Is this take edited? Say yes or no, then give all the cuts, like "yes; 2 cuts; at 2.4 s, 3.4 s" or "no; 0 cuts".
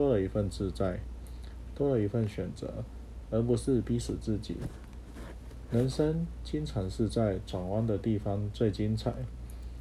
no; 0 cuts